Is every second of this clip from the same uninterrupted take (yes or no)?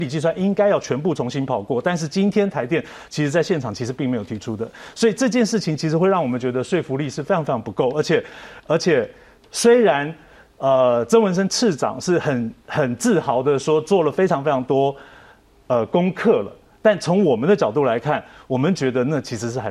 yes